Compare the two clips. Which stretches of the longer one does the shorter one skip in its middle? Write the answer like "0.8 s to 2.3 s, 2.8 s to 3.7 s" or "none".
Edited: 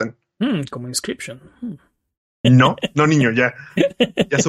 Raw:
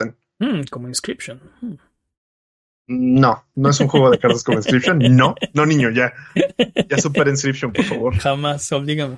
2.4 s to 5.0 s